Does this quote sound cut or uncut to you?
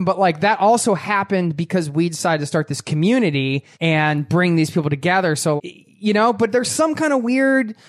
cut